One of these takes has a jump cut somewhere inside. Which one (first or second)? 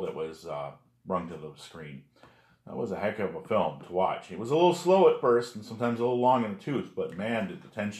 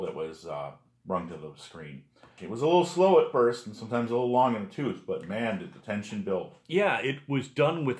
second